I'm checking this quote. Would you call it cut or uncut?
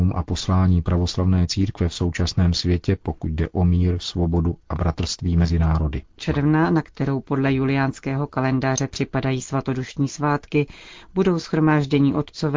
cut